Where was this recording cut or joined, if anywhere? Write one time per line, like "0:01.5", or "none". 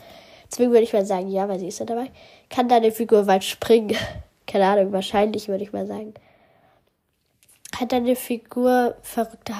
none